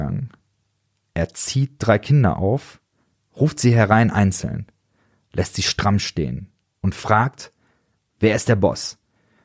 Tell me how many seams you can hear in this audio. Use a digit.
0